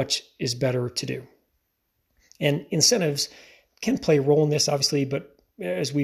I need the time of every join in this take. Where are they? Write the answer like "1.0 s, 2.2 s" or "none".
none